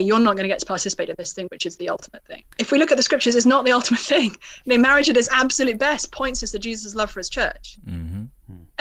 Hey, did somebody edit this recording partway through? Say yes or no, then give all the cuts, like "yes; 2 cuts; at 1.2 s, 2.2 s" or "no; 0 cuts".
yes; 1 cut; at 2.5 s